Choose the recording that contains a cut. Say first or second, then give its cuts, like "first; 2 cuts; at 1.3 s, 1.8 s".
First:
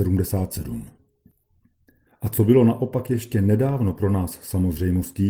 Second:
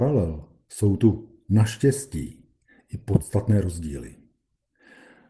first; 1 cut; at 2.1 s